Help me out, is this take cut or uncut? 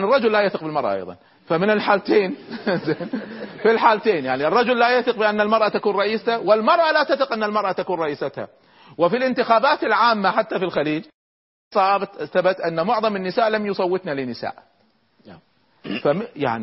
uncut